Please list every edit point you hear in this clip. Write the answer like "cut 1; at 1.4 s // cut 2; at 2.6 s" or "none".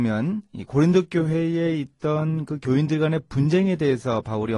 none